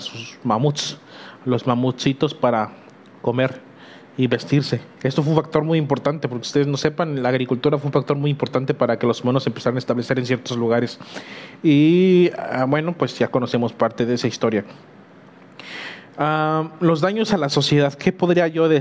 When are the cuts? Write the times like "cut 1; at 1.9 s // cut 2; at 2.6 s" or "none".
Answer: cut 1; at 5.0 s